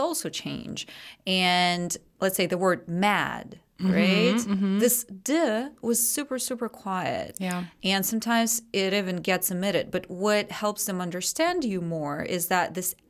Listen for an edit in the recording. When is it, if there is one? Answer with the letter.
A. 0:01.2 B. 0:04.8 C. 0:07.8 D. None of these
D